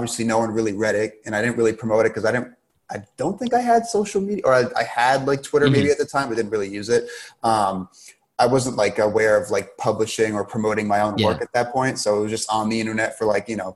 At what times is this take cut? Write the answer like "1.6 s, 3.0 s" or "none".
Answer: none